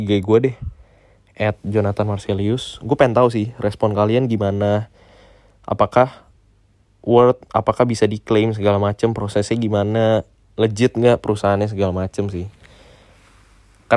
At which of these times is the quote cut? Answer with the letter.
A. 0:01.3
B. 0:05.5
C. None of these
C